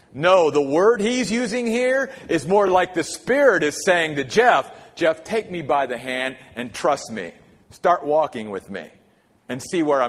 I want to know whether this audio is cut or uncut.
uncut